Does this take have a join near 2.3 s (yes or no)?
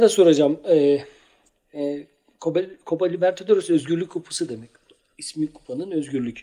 no